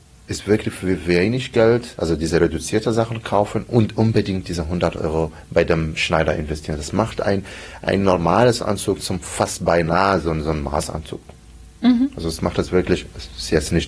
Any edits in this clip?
no; 0 cuts

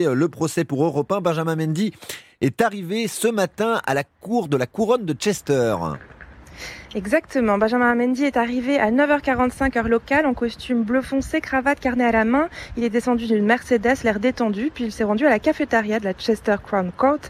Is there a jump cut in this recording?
no; 0 cuts

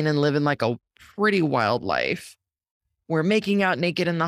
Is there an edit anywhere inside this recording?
no; 0 cuts

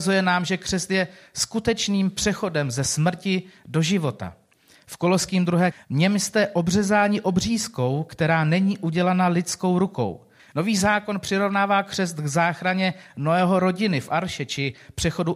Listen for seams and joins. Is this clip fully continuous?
no; 2 cuts; at 5.7 s, 10.4 s

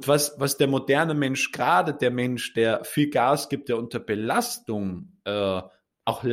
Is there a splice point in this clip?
no; 0 cuts

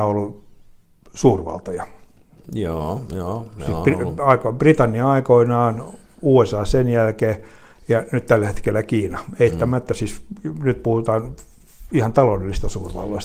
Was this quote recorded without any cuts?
yes; 0 cuts

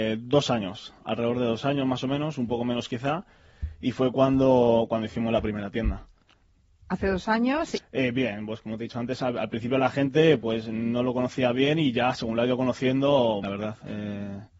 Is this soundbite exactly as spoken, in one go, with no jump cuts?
no; 2 cuts; at 7.8 s, 13.4 s

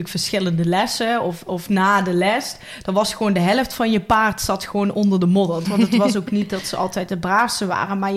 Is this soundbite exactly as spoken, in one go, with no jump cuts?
no; 1 cut; at 5.6 s

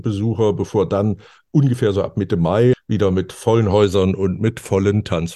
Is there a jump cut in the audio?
yes; 1 cut; at 2.7 s

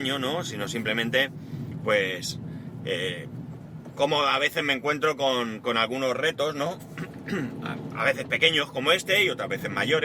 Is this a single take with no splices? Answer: yes; 0 cuts

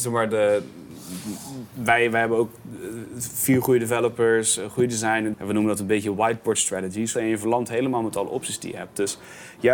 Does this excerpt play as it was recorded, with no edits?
no; 2 cuts; at 5.3 s, 7.1 s

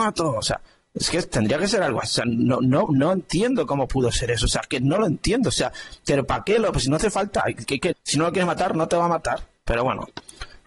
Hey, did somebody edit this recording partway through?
yes; 2 cuts; at 7.9 s, 9.6 s

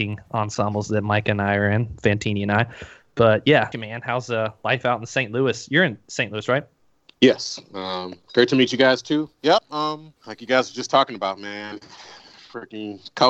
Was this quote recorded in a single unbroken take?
no; 2 cuts; at 3.7 s, 10.2 s

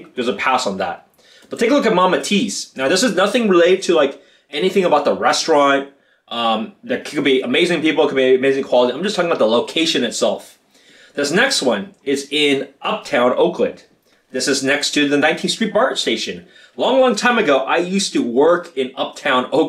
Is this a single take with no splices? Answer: yes; 0 cuts

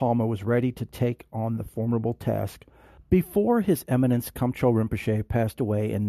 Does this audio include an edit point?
yes; 1 cut; at 3.0 s

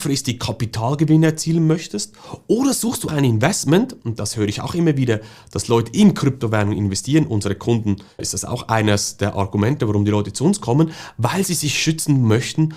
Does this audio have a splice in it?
yes; 1 cut; at 3.1 s

